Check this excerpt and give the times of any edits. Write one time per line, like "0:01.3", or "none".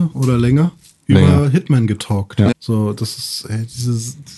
0:02.5